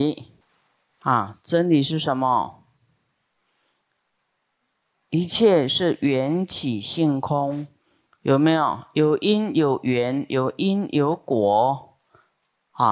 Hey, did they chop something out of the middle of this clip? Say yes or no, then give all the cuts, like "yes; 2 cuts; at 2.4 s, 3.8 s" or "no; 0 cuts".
no; 0 cuts